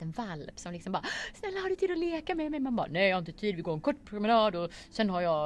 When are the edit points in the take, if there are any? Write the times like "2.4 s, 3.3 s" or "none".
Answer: none